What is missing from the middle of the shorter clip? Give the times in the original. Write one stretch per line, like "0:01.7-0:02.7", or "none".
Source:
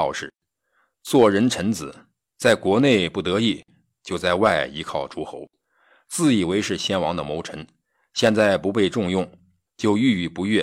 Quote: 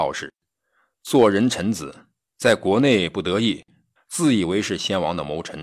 0:04.0-0:06.0